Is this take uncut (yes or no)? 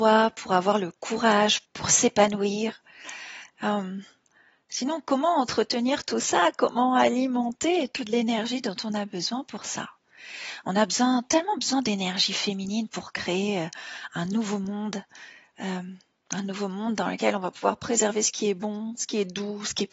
no